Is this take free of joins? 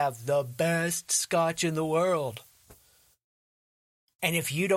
yes; 0 cuts

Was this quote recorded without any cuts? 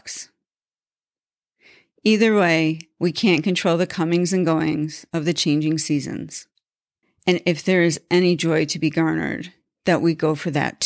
no; 1 cut; at 7.0 s

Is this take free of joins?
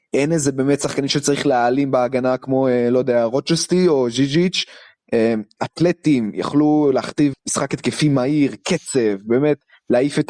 no; 2 cuts; at 5.6 s, 7.3 s

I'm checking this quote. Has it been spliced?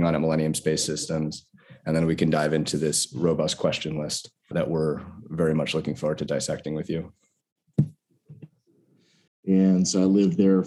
yes; 2 cuts; at 4.5 s, 9.3 s

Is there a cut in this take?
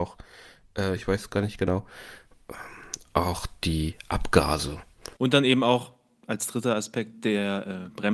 yes; 2 cuts; at 1.0 s, 5.2 s

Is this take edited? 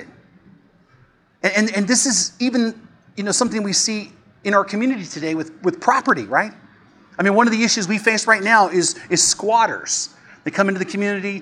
no; 0 cuts

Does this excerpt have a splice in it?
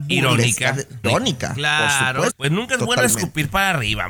yes; 2 cuts; at 1.0 s, 2.3 s

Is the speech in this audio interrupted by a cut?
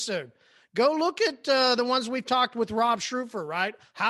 no; 0 cuts

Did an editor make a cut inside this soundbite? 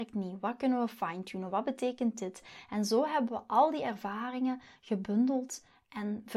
no; 0 cuts

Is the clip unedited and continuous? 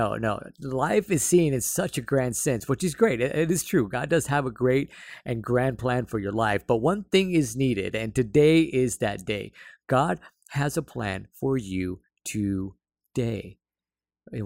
yes; 0 cuts

